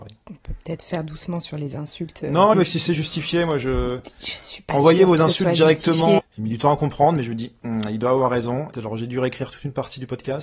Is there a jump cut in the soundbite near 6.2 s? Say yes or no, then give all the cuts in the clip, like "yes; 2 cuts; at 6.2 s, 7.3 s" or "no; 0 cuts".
yes; 3 cuts; at 2.5 s, 6.2 s, 8.7 s